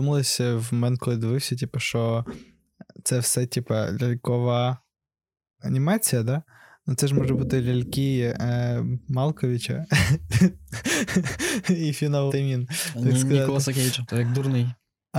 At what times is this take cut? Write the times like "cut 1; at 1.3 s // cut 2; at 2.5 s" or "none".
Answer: cut 1; at 12.3 s // cut 2; at 14.1 s